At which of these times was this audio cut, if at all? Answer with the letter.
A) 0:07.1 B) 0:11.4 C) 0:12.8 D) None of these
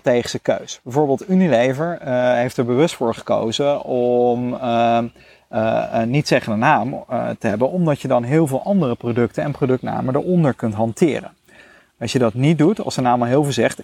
D